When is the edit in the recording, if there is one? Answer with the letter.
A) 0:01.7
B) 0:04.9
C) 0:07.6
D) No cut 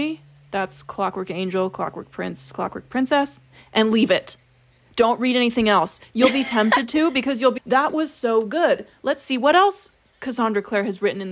C